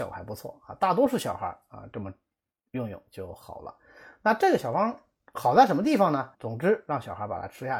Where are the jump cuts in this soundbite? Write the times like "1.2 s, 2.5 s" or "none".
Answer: 6.3 s